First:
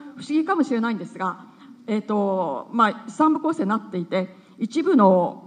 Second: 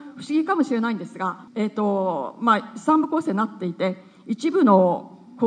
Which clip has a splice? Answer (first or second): second